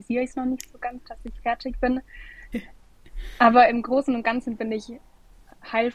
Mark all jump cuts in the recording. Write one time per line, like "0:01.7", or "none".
0:02.5